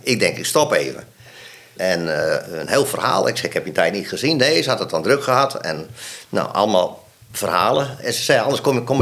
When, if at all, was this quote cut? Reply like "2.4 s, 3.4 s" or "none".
1.8 s